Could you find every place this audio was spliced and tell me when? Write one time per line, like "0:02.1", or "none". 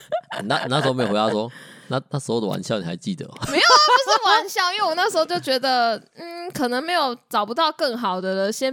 none